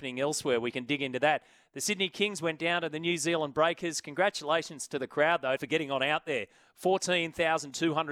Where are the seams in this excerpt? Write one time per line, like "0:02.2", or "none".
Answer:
0:05.6